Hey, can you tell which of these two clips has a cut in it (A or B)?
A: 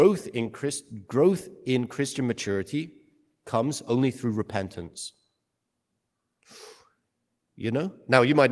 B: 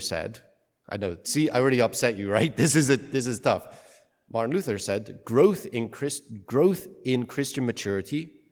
A